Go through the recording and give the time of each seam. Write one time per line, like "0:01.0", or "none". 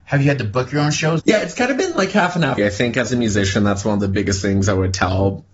0:01.2
0:02.6